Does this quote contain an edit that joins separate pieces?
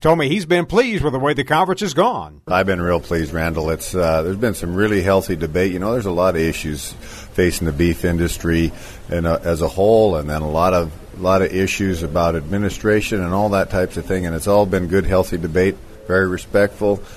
no; 0 cuts

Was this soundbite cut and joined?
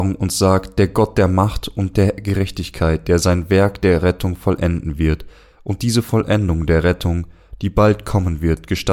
no; 0 cuts

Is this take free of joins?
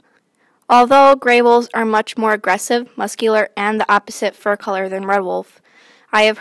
yes; 0 cuts

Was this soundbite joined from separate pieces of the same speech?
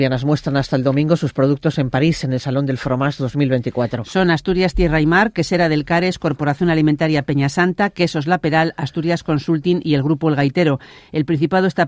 no; 0 cuts

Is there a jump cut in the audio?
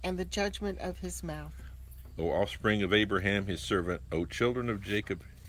no; 0 cuts

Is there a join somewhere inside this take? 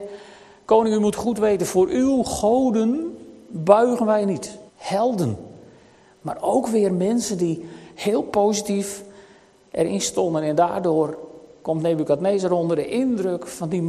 yes; 1 cut; at 4.7 s

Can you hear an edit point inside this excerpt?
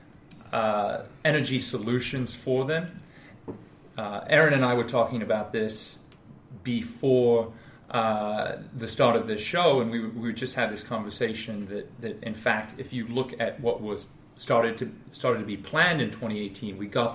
yes; 1 cut; at 3.9 s

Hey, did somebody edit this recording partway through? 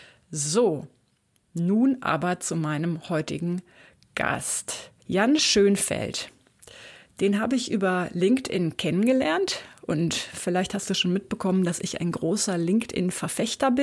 yes; 1 cut; at 5.0 s

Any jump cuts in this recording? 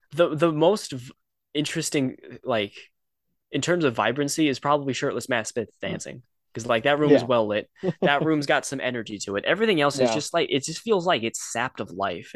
no; 0 cuts

